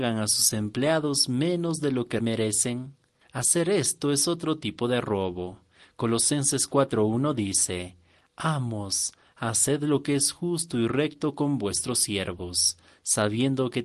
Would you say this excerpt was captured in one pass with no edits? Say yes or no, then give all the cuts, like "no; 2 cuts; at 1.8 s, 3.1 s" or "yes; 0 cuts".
no; 1 cut; at 2.2 s